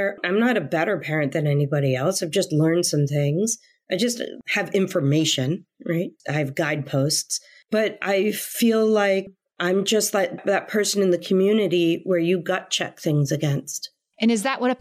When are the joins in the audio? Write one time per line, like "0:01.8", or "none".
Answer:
0:04.4